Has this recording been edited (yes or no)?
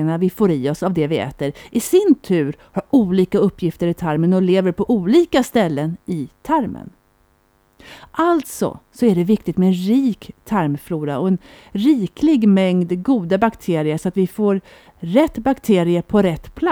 no